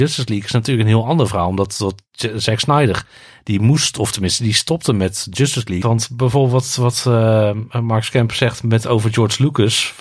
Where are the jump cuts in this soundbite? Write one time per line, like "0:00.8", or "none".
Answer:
0:05.8